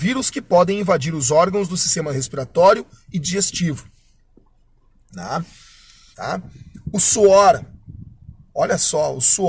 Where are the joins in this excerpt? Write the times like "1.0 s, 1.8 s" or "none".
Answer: 6.1 s

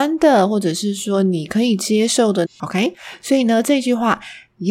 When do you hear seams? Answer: 2.4 s

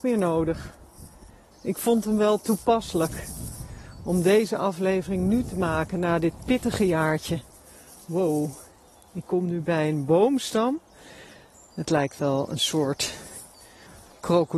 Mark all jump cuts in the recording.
1.5 s

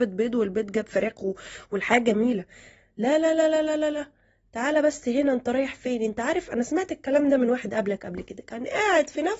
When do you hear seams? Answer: none

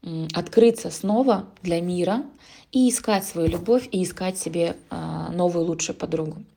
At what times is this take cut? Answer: none

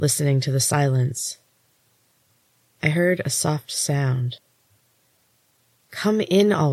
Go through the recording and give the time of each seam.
none

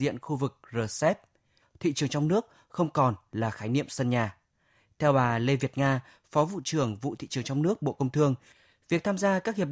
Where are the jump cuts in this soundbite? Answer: 1.6 s

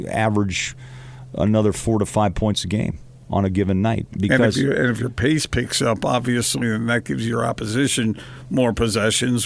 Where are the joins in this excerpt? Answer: none

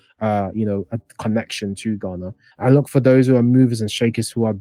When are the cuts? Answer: 2.5 s

